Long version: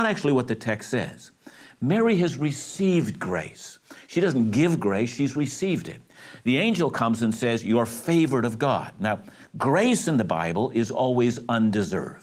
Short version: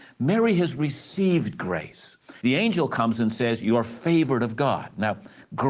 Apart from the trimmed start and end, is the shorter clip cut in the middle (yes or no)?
yes